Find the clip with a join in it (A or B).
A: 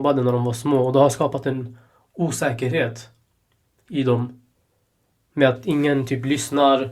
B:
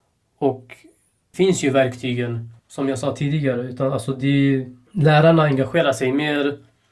B